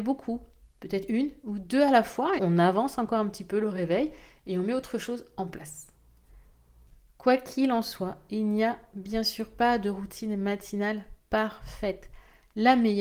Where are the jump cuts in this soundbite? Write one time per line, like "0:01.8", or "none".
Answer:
0:02.4